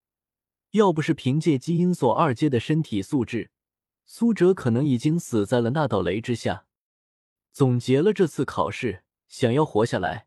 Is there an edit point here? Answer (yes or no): yes